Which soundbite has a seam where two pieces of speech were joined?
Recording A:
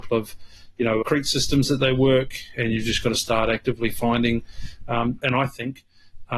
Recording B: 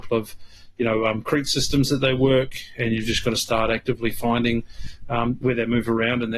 A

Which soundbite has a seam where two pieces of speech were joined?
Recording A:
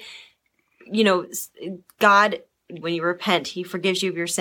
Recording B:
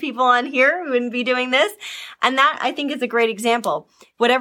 A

